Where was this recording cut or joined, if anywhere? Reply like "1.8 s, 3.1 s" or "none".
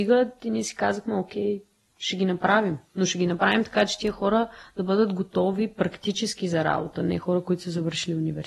none